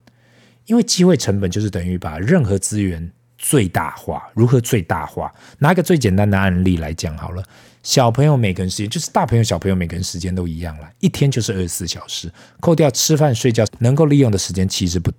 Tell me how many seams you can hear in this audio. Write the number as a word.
one